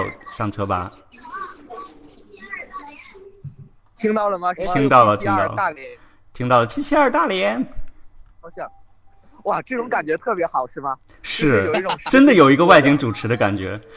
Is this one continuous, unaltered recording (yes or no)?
yes